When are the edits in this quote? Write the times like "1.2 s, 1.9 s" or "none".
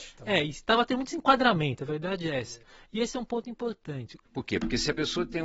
4.2 s